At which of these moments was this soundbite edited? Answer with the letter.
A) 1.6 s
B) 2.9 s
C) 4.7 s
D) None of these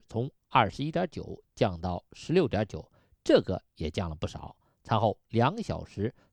D